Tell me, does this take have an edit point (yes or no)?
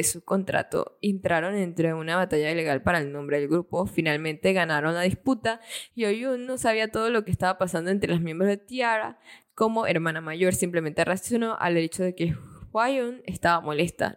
yes